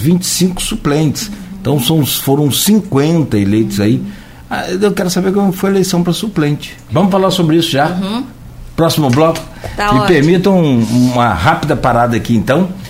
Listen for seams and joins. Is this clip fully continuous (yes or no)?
no